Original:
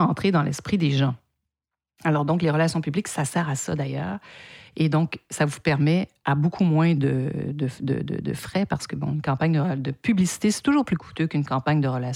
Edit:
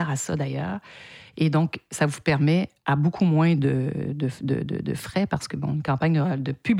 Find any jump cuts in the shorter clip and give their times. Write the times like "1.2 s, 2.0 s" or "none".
none